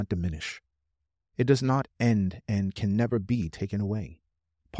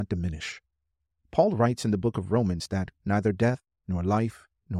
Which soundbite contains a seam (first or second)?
second